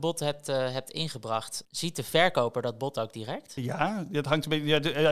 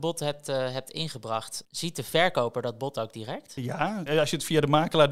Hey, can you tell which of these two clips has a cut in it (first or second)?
second